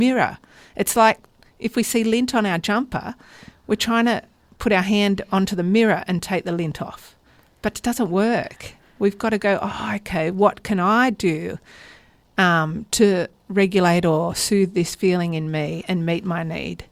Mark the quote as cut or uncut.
uncut